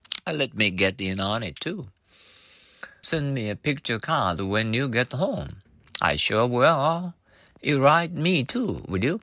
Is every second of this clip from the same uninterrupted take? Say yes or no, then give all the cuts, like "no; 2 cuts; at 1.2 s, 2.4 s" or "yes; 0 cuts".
no; 1 cut; at 3.0 s